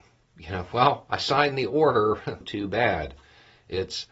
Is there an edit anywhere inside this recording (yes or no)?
yes